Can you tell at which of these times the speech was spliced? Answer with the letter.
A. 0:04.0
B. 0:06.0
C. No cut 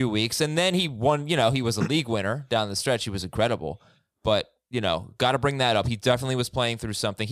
C